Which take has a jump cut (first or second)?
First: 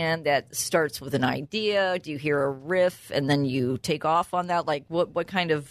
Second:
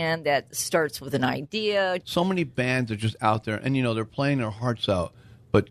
second